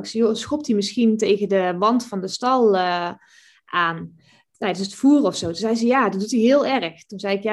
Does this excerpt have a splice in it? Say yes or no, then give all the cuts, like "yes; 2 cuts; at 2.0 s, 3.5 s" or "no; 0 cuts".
no; 0 cuts